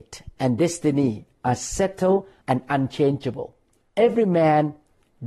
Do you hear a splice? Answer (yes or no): yes